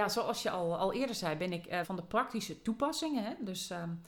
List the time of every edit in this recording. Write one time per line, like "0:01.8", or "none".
0:01.8